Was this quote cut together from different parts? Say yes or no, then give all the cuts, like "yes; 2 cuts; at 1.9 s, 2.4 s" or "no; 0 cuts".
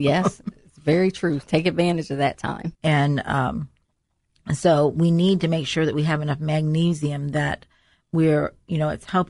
yes; 1 cut; at 2.7 s